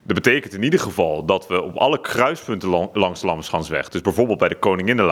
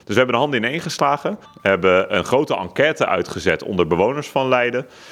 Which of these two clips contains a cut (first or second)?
second